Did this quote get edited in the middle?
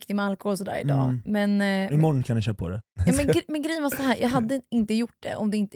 no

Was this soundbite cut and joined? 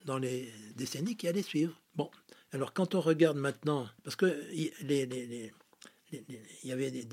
yes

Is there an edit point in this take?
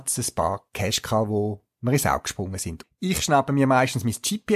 yes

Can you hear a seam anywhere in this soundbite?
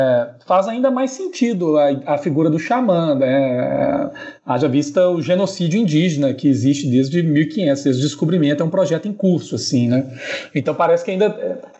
no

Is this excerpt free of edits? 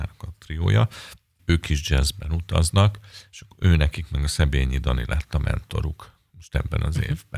no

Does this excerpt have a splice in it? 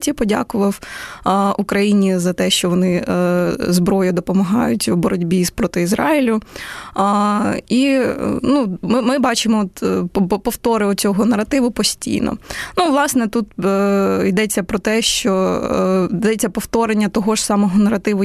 no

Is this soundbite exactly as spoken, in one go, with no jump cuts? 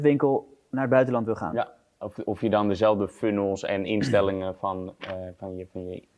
yes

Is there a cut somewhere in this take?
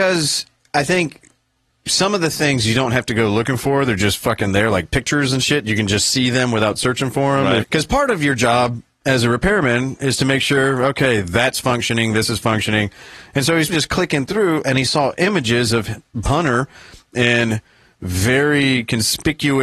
yes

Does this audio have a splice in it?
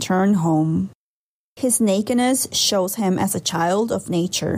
no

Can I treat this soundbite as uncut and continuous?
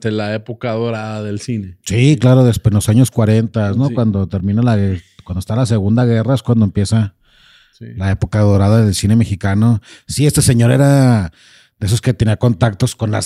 yes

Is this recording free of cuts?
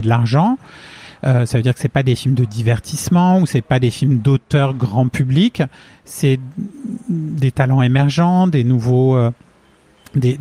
yes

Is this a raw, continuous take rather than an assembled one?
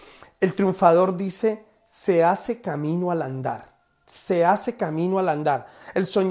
yes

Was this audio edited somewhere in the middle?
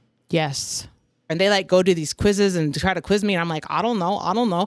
yes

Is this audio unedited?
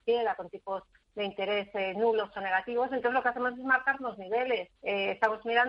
no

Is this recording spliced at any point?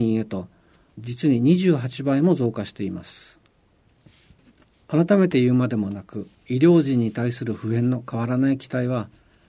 no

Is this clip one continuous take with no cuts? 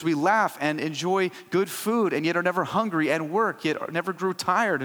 yes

